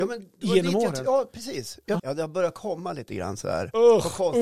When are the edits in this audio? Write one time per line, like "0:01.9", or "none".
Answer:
0:02.0